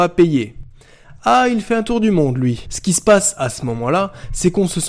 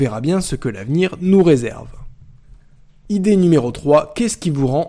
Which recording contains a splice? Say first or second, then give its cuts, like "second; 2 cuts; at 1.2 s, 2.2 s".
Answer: first; 1 cut; at 2.7 s